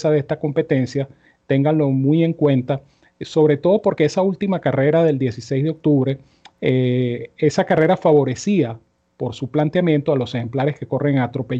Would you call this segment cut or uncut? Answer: uncut